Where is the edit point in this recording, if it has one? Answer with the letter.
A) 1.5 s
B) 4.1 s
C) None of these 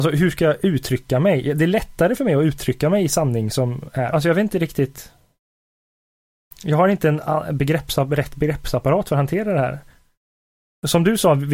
B